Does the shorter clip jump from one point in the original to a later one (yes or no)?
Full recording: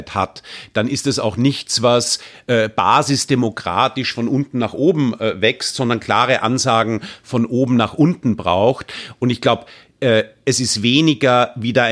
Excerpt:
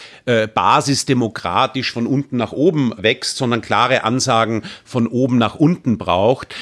yes